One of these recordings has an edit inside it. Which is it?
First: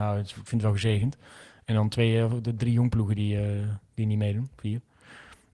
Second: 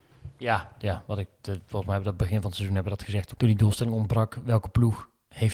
second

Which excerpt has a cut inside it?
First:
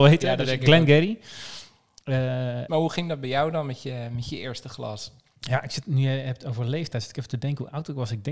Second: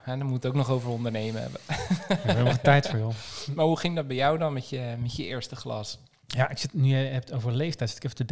first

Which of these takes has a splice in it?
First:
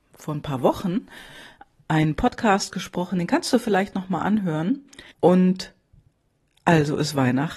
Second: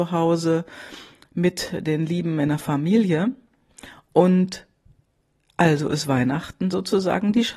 first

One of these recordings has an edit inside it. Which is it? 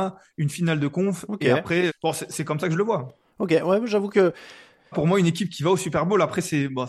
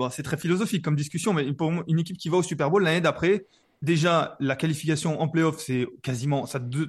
first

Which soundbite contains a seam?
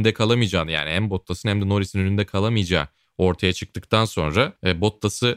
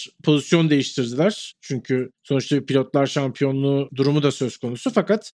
second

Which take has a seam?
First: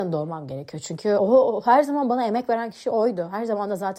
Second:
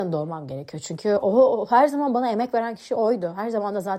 first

